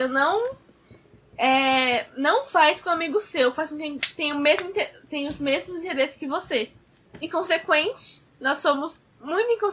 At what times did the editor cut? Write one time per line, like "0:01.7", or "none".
0:07.0